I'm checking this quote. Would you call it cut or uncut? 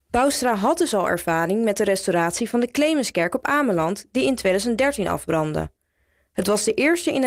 uncut